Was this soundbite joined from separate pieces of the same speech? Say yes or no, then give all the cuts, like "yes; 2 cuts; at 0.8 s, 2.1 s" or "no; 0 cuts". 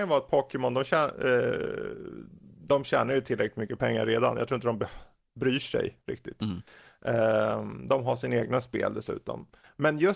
no; 0 cuts